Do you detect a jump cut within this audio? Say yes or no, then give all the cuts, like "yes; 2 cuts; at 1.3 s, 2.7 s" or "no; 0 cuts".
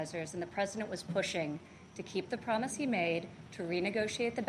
no; 0 cuts